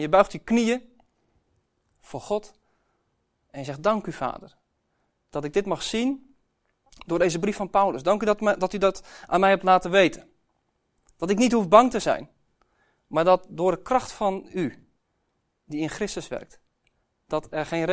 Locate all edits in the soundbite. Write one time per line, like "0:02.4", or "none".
none